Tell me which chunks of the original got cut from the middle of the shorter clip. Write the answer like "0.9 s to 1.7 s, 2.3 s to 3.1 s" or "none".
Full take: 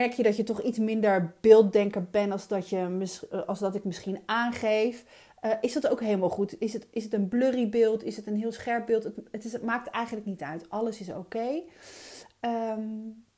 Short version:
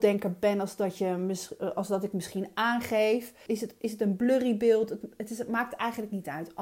5.2 s to 6.6 s, 8.0 s to 9.0 s